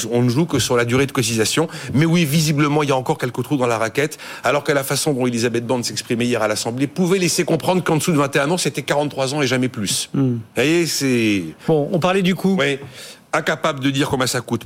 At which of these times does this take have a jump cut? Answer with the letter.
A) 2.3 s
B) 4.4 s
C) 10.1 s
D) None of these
D